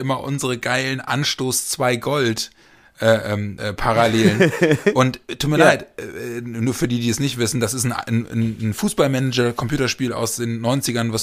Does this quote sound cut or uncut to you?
uncut